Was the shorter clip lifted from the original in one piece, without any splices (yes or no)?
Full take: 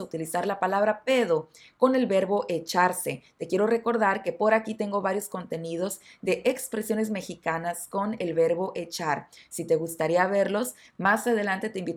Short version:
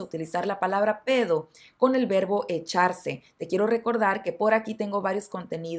yes